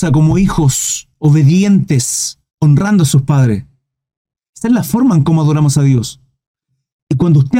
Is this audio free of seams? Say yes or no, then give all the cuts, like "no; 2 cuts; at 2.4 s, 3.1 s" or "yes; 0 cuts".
no; 1 cut; at 2.5 s